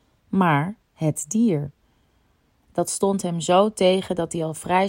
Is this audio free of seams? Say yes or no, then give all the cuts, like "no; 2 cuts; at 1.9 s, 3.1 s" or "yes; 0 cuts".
yes; 0 cuts